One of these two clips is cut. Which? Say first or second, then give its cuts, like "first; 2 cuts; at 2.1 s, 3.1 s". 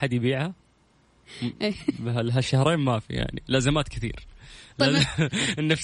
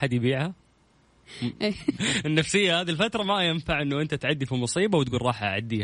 second; 1 cut; at 2.0 s